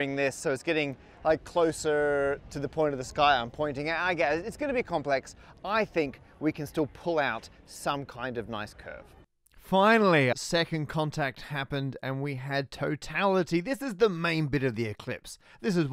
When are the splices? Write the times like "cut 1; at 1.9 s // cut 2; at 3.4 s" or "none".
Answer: cut 1; at 10.3 s